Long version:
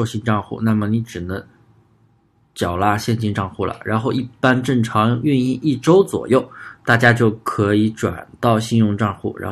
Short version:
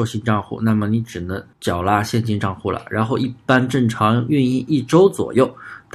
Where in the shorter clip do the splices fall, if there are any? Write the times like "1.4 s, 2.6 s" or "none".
1.5 s